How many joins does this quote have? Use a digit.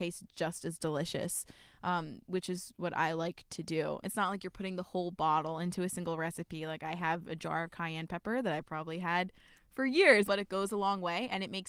2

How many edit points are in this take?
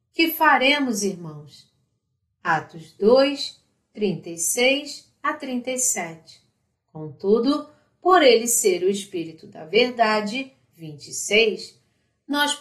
2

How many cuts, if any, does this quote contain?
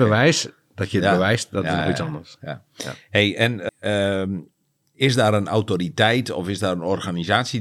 1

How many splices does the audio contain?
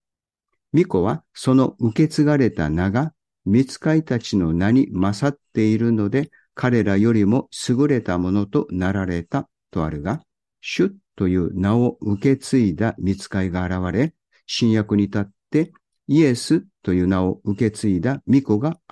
1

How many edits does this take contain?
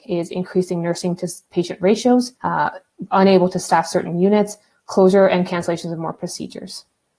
1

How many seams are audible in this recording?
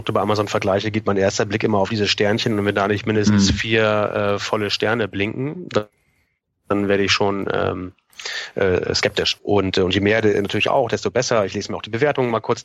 1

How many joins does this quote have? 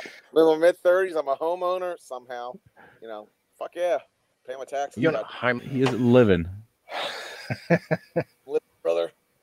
1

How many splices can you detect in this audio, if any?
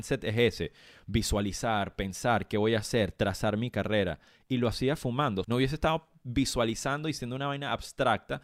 1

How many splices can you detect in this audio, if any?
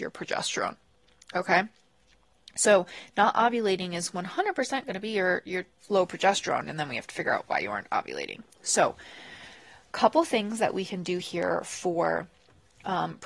1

